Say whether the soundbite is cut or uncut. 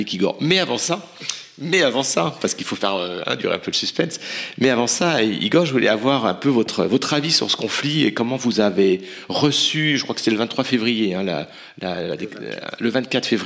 uncut